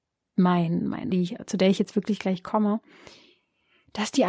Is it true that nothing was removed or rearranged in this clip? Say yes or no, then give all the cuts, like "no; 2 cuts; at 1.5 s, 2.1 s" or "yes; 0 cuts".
no; 1 cut; at 1.1 s